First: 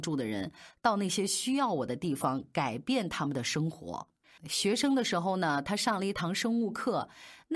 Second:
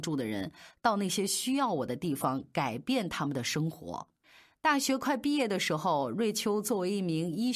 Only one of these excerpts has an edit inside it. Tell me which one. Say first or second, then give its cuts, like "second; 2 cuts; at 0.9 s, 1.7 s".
first; 1 cut; at 4.4 s